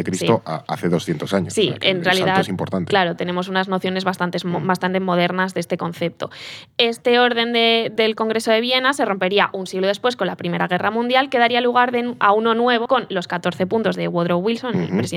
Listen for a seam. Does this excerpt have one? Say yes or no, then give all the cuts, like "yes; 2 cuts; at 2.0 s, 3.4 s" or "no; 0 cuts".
yes; 2 cuts; at 8.0 s, 12.9 s